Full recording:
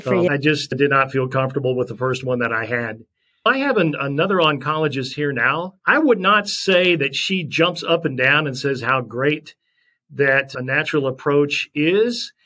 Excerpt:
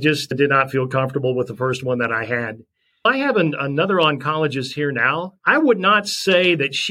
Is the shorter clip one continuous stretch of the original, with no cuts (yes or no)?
yes